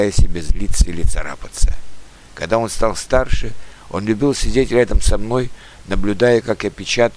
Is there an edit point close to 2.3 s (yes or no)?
no